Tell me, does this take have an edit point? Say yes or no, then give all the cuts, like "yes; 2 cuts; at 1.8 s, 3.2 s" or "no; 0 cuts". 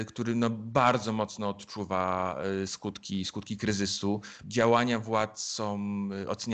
yes; 1 cut; at 4.4 s